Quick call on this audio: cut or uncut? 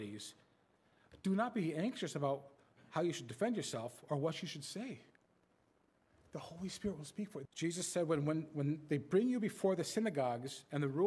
cut